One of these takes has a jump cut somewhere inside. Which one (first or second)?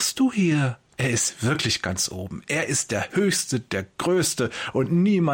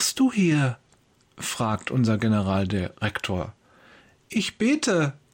first